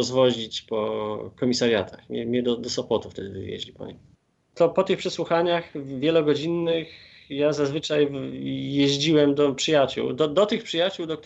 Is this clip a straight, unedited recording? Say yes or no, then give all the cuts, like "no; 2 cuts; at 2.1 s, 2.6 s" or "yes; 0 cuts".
yes; 0 cuts